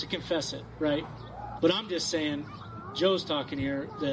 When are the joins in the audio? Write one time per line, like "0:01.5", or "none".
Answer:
0:01.6